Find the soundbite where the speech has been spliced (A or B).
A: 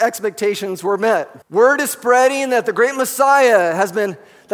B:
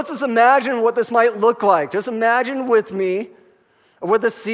A